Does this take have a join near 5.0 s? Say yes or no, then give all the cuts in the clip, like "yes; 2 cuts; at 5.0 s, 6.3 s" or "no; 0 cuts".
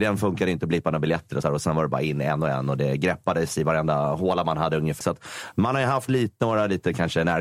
yes; 2 cuts; at 1.4 s, 5.0 s